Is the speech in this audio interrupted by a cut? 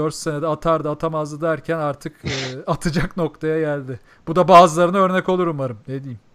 no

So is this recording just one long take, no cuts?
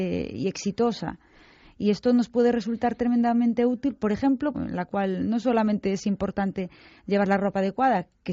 no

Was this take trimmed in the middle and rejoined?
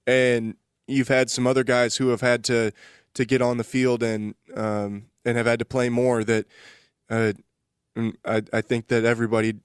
no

